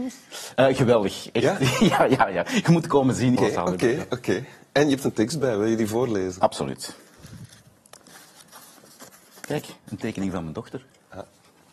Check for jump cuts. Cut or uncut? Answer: cut